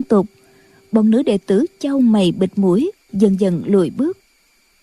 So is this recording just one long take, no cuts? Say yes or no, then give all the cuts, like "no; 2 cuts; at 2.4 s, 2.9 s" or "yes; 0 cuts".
yes; 0 cuts